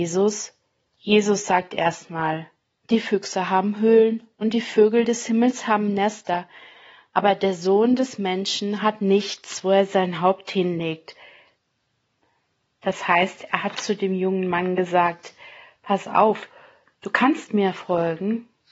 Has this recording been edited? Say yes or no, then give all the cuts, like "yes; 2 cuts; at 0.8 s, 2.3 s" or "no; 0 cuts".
no; 0 cuts